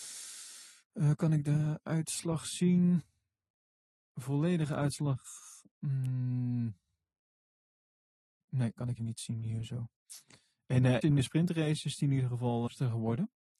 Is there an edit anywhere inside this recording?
yes; 3 cuts; at 9.0 s, 11.0 s, 12.7 s

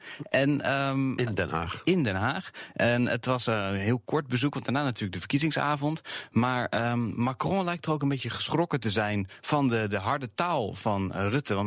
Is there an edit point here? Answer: no; 0 cuts

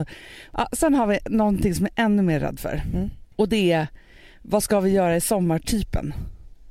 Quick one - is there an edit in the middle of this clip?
yes; 1 cut; at 3.3 s

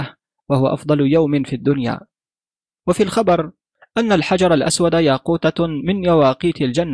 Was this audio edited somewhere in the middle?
no; 0 cuts

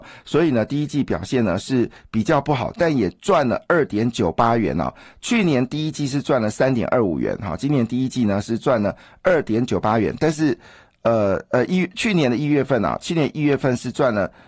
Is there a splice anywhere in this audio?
no; 0 cuts

